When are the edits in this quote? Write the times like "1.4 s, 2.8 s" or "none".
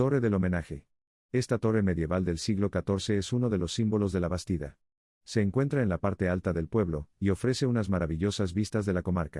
none